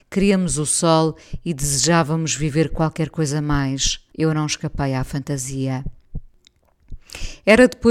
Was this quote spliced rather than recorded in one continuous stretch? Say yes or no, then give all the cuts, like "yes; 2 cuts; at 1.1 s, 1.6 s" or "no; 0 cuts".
yes; 1 cut; at 4.1 s